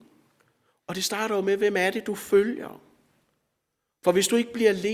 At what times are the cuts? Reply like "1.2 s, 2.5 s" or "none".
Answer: none